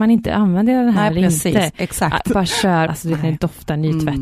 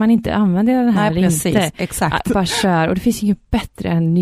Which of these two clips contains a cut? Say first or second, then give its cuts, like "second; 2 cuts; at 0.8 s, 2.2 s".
first; 1 cut; at 2.9 s